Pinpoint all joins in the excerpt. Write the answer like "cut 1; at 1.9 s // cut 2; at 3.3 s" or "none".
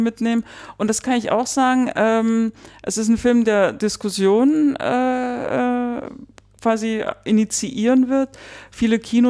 none